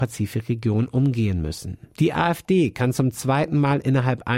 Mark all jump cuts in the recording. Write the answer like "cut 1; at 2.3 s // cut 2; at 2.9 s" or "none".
cut 1; at 1.9 s